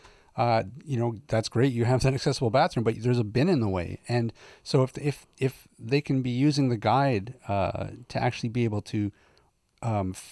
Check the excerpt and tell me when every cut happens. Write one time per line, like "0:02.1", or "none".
none